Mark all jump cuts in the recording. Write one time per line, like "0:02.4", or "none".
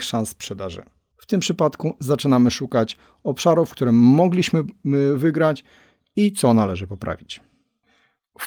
0:01.1